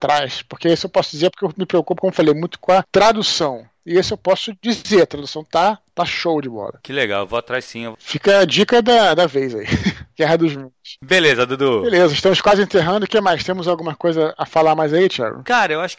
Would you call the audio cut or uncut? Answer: uncut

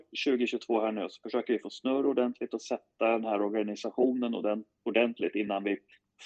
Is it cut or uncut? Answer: uncut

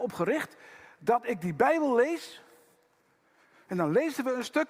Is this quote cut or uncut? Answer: uncut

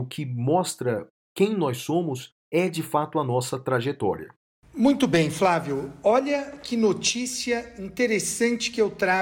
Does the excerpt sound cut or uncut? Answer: uncut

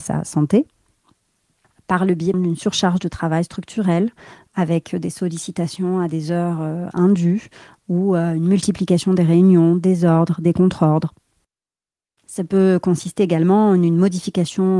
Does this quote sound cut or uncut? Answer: cut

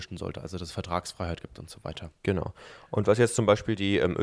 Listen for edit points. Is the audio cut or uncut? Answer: uncut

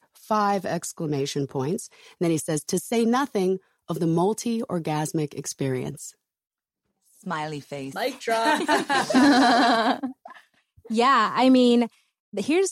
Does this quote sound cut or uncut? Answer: uncut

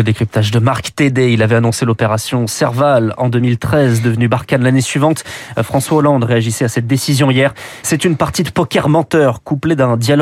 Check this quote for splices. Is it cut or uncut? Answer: cut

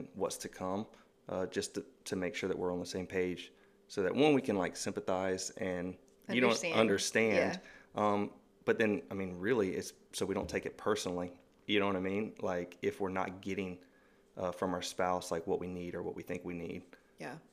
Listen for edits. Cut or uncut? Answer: uncut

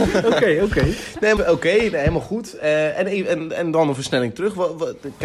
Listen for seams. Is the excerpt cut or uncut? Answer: cut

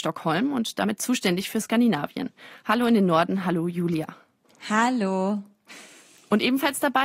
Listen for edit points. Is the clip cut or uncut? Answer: uncut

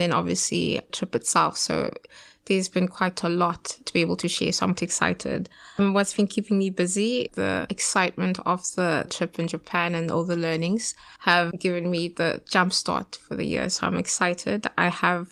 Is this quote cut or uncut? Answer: cut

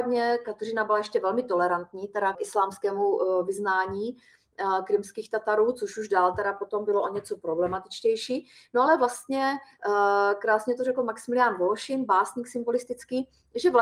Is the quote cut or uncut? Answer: cut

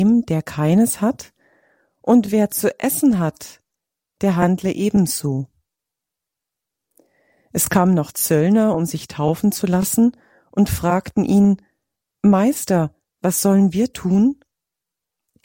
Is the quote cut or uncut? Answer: uncut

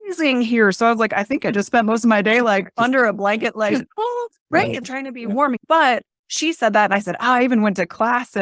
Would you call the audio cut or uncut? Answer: uncut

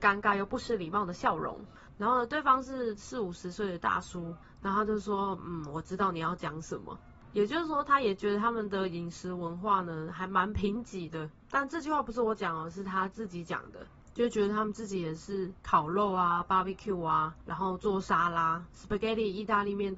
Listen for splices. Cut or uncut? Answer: uncut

